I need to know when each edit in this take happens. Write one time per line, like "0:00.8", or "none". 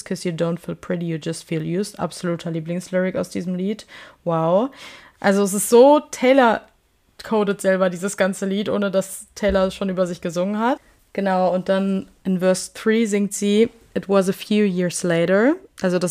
0:05.1